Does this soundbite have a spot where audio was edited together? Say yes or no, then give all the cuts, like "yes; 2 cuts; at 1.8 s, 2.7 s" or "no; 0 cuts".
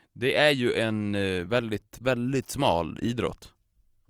no; 0 cuts